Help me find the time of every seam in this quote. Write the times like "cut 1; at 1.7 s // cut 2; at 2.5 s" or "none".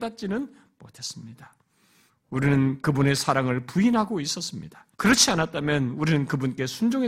cut 1; at 2.1 s // cut 2; at 4.9 s